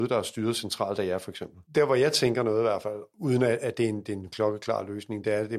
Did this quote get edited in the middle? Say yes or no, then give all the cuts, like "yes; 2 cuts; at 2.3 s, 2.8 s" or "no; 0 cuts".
yes; 1 cut; at 1.7 s